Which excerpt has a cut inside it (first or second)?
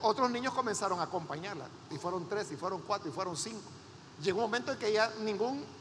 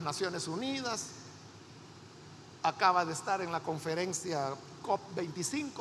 first